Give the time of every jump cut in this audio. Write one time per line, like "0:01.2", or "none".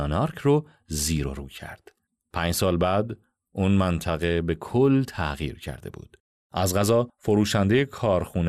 0:06.4